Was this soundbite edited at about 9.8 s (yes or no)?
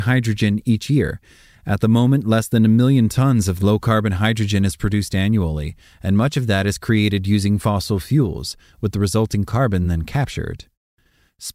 no